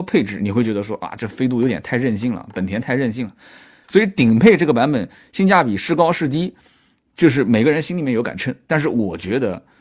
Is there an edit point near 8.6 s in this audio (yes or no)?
no